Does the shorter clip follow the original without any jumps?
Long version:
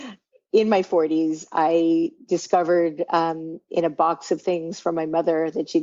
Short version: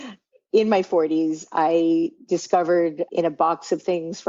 no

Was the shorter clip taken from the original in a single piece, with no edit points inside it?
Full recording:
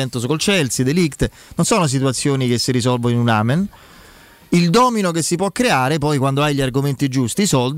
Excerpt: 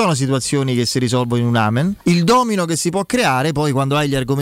no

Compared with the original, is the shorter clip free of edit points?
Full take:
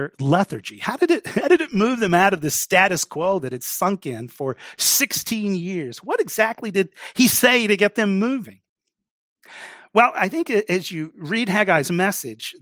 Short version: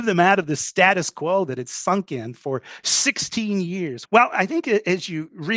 no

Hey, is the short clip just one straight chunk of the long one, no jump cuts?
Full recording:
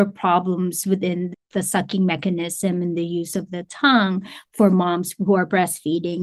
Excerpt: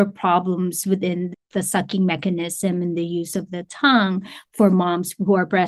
yes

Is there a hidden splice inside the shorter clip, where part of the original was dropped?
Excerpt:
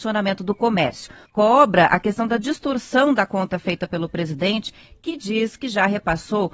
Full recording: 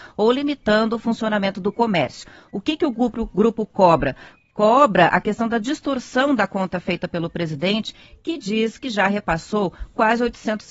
yes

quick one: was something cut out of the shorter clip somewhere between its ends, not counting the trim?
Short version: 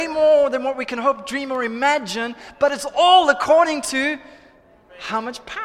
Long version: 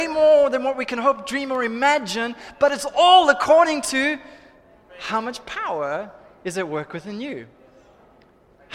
no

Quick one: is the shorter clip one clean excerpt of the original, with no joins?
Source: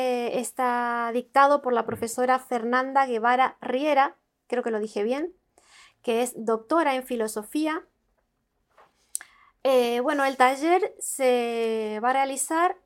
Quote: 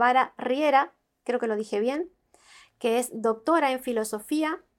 yes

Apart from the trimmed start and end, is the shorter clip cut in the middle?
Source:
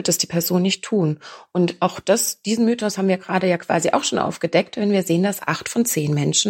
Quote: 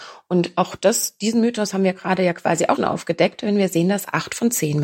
yes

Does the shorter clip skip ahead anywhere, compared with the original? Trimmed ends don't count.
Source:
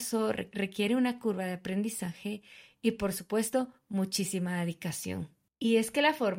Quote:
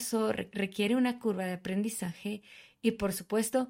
no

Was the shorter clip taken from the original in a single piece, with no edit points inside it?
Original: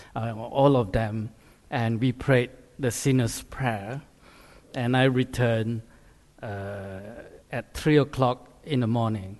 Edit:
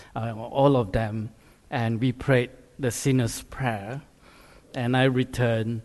yes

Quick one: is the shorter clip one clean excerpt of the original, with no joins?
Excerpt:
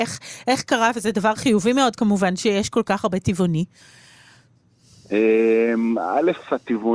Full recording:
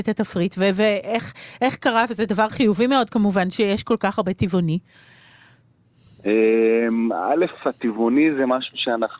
yes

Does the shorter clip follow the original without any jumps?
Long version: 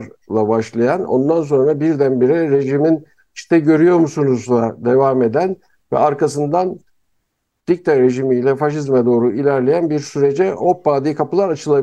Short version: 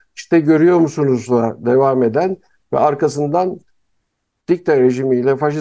yes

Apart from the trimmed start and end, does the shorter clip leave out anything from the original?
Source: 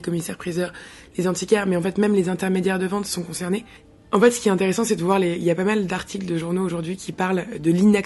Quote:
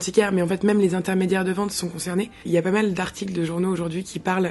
yes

